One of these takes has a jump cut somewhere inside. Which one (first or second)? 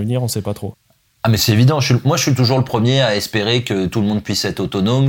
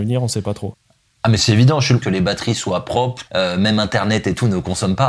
second